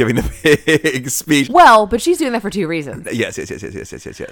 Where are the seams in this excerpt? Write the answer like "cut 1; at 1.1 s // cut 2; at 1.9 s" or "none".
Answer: cut 1; at 1.4 s // cut 2; at 3.0 s